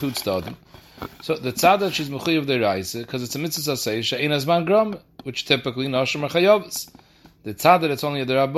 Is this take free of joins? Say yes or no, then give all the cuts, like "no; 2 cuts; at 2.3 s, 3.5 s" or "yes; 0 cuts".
yes; 0 cuts